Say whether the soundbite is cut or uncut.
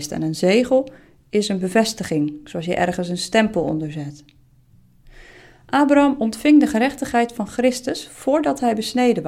uncut